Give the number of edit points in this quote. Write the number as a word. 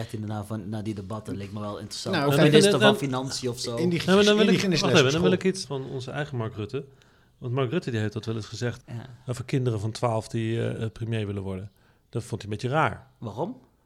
three